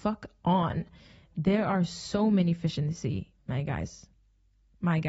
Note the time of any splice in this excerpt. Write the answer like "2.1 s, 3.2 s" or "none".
none